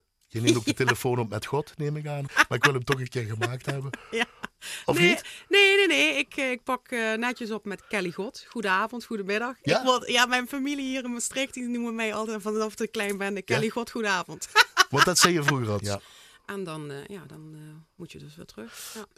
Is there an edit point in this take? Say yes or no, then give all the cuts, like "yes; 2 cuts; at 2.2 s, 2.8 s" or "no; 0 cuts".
yes; 2 cuts; at 2.3 s, 15.8 s